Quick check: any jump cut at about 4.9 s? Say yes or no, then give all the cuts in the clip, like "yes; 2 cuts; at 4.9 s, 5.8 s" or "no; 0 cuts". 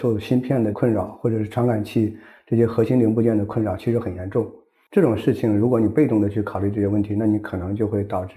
no; 0 cuts